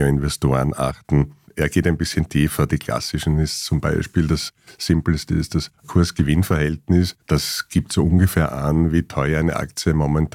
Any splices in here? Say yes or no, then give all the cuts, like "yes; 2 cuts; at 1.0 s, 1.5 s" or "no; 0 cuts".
no; 0 cuts